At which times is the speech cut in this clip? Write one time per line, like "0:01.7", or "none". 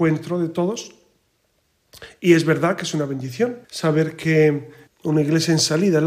0:03.6
0:04.9